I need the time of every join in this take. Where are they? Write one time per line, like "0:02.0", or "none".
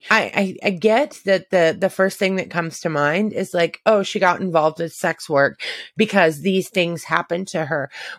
none